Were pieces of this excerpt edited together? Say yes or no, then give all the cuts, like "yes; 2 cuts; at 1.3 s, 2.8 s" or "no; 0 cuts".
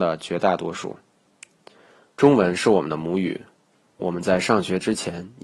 yes; 1 cut; at 2.0 s